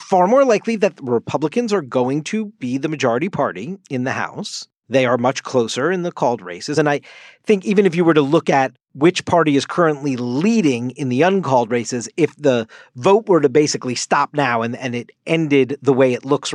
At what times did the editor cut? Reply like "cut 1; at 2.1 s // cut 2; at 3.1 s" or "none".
none